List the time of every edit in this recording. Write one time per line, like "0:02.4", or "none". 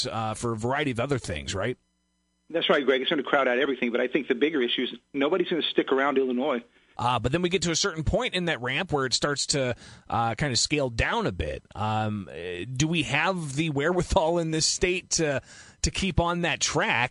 0:07.0